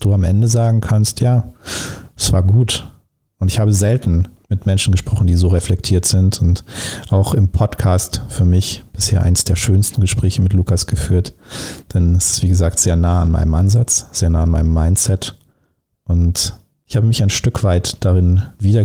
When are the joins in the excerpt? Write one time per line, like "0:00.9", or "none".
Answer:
0:03.3